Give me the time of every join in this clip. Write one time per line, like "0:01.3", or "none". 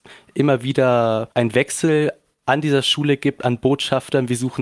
0:01.3